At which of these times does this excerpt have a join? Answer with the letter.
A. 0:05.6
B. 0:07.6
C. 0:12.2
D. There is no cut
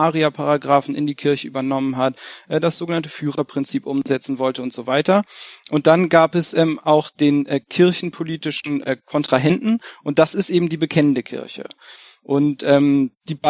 D